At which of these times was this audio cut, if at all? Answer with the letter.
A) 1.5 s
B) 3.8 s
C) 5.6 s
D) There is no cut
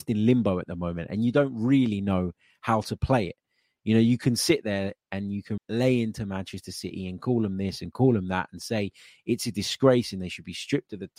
C